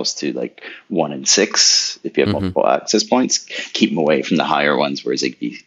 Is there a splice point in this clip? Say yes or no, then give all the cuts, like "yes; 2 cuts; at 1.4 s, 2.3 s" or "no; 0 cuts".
no; 0 cuts